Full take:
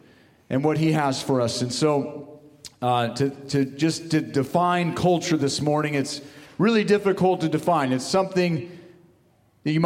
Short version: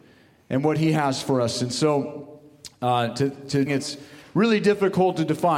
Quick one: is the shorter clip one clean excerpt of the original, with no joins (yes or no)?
no